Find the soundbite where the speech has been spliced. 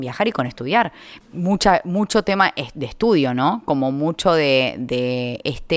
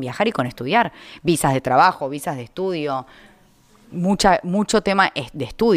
first; 1 cut; at 1.2 s

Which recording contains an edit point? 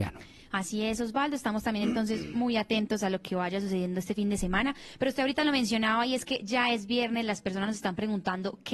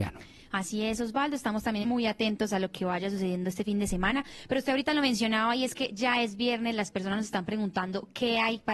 second; 1 cut; at 1.8 s

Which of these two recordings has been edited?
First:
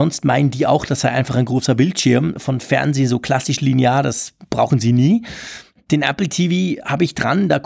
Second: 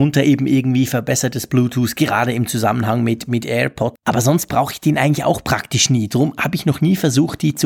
second; 1 cut; at 3.9 s

